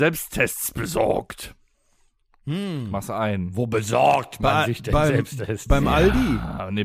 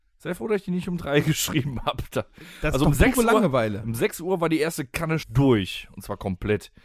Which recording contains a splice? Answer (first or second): second